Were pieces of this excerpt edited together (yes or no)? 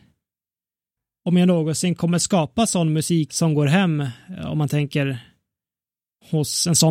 yes